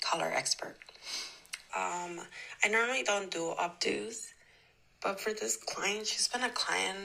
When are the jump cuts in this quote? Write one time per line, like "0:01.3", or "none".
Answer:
0:01.7

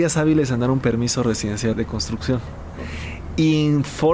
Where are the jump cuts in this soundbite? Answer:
0:01.7

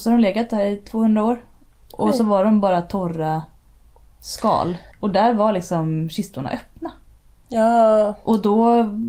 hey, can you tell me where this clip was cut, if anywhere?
0:04.9

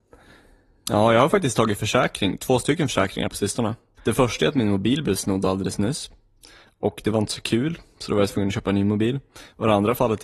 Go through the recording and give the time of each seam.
0:04.0

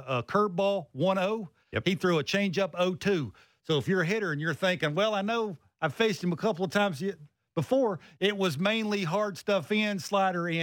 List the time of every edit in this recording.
none

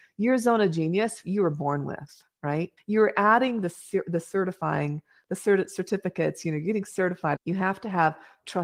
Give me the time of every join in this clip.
0:02.8
0:07.4

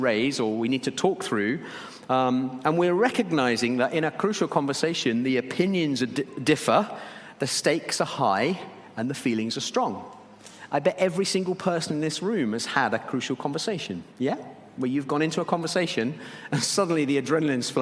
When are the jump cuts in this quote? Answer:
0:14.1

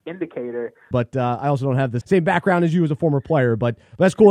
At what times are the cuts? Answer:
0:00.9
0:02.0

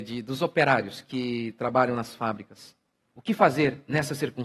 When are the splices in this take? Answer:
0:03.1

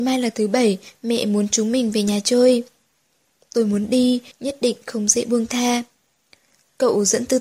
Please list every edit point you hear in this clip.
0:04.3

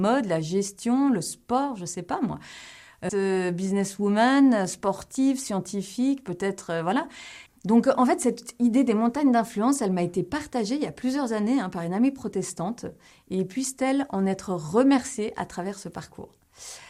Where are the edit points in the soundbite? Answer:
0:03.1
0:07.5

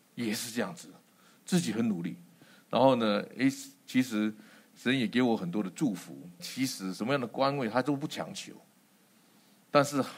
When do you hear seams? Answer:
0:06.4

